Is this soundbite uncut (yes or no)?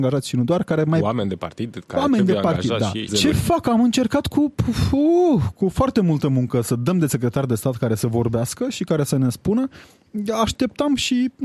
no